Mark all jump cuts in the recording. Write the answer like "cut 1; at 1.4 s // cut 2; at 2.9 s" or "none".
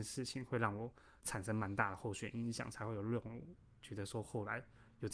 none